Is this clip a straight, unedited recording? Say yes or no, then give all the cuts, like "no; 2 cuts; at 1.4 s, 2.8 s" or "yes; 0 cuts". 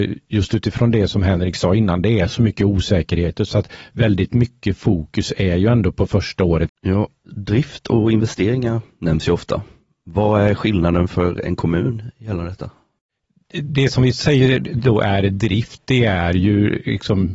no; 1 cut; at 6.7 s